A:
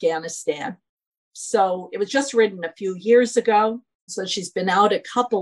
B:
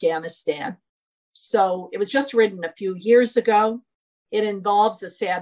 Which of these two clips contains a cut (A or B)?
A